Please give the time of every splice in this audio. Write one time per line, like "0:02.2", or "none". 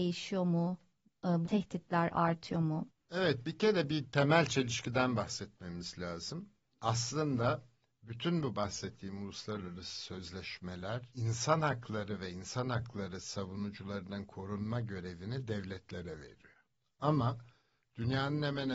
0:01.4
0:02.9